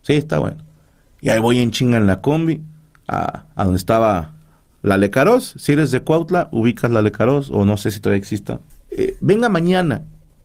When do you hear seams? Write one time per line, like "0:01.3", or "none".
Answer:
0:08.7